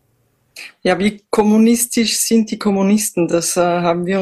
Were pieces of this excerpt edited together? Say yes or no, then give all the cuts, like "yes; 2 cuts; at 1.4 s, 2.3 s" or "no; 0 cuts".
no; 0 cuts